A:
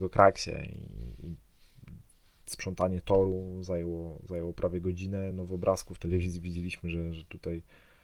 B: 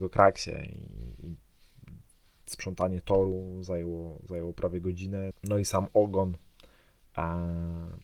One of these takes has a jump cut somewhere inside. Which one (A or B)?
B